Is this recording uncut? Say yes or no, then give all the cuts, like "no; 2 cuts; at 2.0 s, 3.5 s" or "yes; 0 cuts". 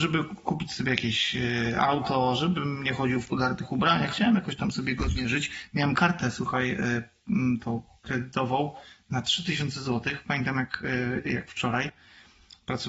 yes; 0 cuts